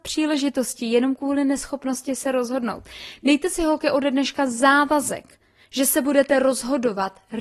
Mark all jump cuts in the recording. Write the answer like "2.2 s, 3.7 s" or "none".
none